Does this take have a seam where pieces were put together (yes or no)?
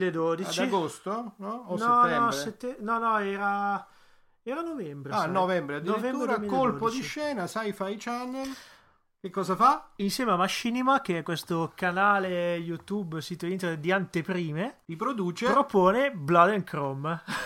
yes